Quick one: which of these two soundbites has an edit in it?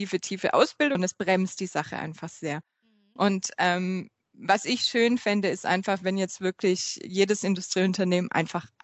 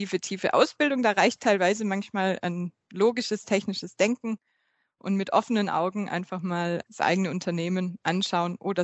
first; 1 cut; at 1.0 s

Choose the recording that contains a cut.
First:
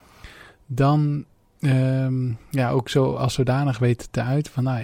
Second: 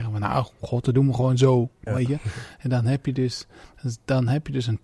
second; 1 cut; at 1.9 s

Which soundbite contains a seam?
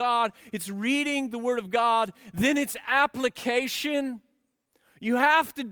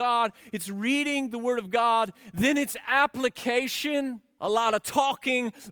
second; 1 cut; at 4.4 s

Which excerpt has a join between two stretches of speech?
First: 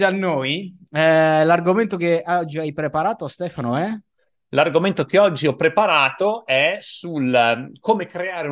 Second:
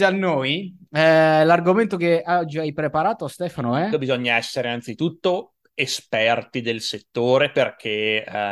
second; 1 cut; at 3.9 s

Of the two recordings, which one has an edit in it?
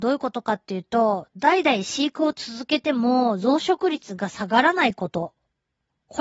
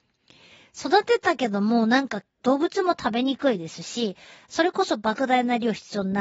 second; 1 cut; at 2.4 s

